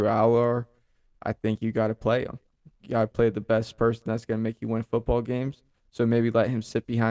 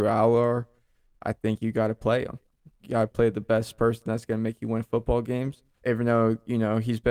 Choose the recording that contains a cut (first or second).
second